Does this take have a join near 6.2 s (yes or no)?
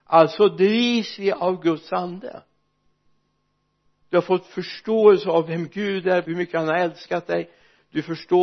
yes